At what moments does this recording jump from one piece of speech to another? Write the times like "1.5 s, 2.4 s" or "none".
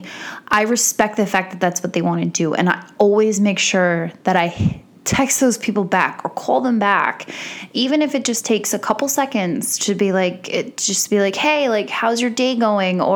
none